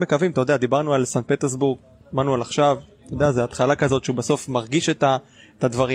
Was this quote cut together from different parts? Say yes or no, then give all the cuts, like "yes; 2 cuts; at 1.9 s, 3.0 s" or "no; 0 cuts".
no; 0 cuts